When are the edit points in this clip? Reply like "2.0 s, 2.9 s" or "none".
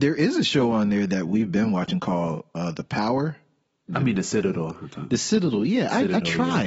3.9 s